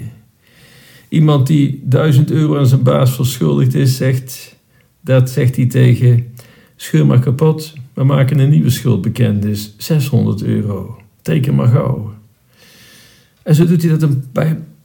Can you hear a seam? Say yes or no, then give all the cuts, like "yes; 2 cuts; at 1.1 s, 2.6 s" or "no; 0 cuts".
no; 0 cuts